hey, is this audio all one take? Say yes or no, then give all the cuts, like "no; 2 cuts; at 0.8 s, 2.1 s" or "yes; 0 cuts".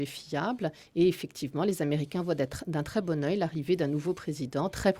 yes; 0 cuts